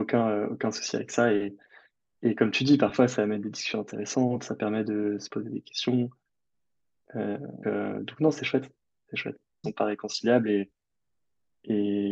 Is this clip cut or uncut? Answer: cut